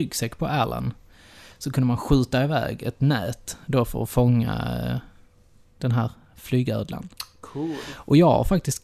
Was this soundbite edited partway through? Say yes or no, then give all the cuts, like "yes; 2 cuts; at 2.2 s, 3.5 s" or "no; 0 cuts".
no; 0 cuts